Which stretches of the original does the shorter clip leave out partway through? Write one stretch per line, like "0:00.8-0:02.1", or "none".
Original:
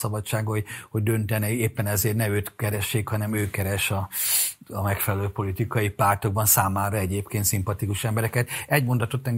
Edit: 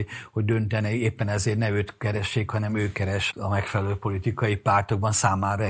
0:03.9-0:04.6